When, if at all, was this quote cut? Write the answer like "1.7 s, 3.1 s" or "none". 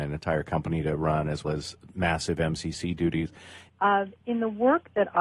1.4 s, 3.7 s